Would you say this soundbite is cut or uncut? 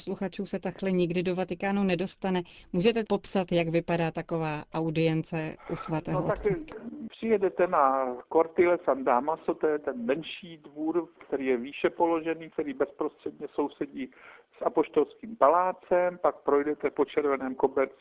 uncut